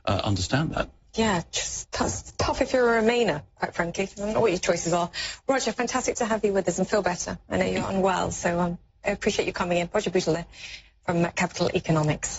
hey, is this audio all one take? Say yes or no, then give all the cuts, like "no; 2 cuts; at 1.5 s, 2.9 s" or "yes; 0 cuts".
yes; 0 cuts